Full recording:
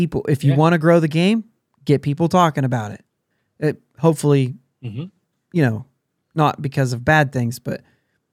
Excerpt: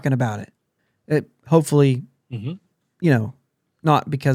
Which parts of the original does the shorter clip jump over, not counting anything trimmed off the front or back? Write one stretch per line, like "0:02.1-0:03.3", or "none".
none